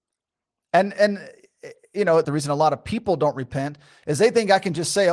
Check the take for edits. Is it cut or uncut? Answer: cut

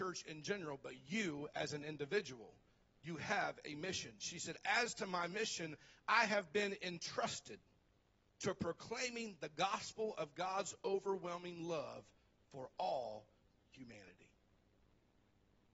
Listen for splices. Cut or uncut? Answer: uncut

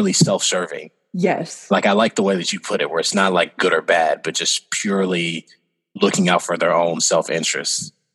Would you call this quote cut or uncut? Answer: uncut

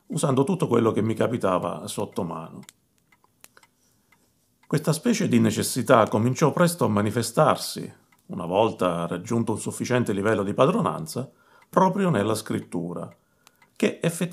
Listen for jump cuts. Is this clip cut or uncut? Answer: uncut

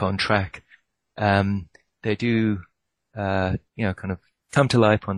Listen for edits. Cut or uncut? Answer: cut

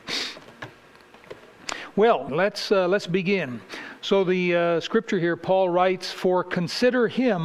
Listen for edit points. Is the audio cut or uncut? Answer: cut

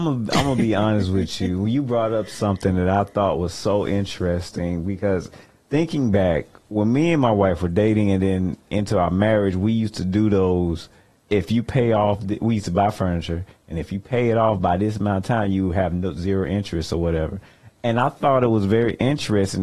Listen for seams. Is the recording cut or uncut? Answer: uncut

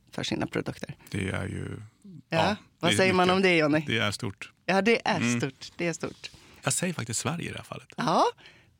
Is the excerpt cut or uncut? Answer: cut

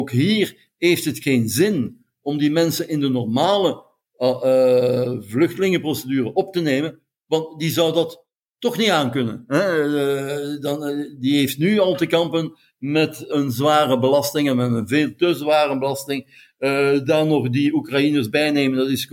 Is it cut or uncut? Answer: cut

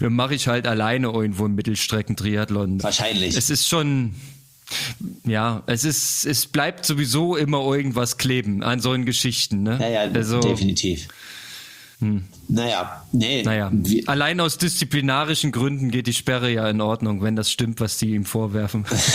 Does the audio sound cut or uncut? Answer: cut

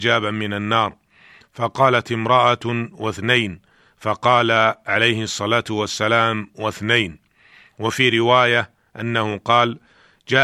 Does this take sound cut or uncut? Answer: uncut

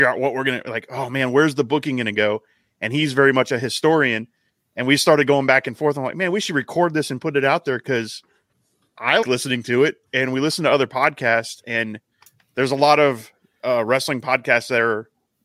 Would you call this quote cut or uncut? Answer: cut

